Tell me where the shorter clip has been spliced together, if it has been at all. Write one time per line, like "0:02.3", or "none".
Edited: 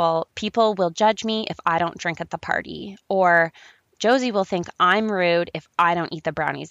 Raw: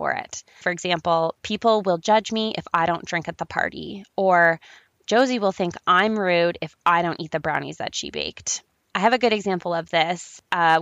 none